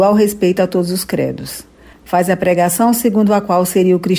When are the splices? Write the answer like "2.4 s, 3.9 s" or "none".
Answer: 1.9 s